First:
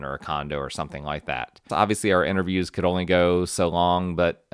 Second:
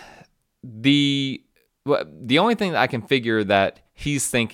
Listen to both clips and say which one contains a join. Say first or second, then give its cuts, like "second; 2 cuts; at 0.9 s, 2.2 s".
first; 1 cut; at 1.7 s